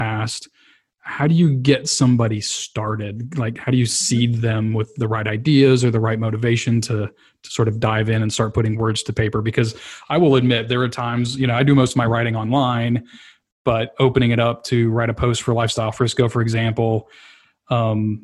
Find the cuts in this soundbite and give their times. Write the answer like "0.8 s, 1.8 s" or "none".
none

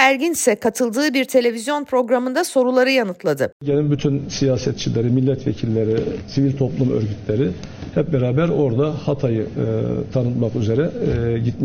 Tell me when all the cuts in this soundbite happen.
3.5 s

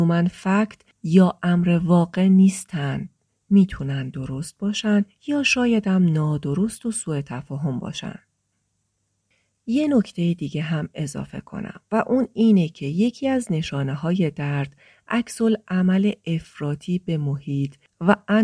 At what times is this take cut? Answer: none

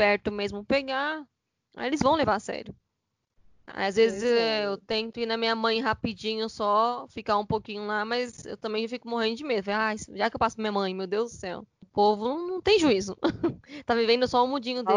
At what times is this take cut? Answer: 11.8 s

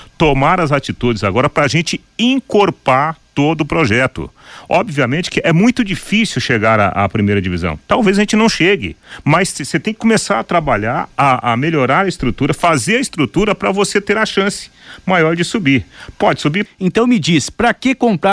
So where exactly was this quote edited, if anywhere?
16.7 s

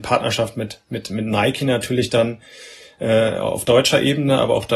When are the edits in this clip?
none

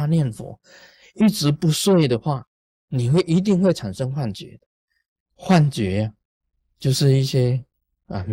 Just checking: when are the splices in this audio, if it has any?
5.3 s

